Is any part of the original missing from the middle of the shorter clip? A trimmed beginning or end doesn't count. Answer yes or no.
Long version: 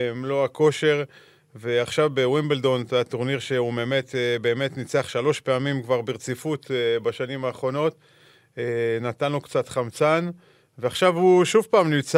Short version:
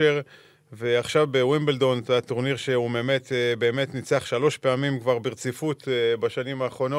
no